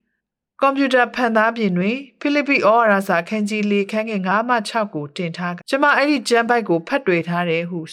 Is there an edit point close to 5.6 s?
yes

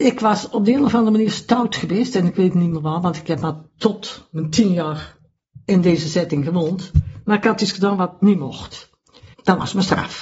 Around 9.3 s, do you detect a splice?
yes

